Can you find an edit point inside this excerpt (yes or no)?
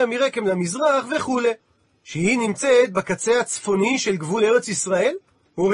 yes